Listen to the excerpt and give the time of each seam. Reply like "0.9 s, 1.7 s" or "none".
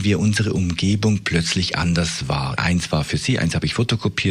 2.6 s

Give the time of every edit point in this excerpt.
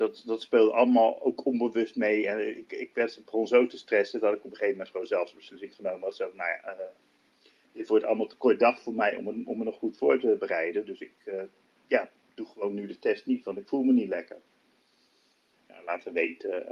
none

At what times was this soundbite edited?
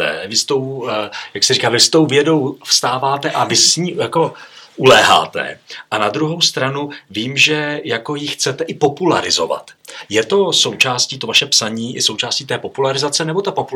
none

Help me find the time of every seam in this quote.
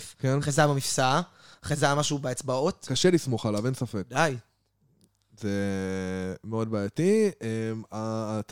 none

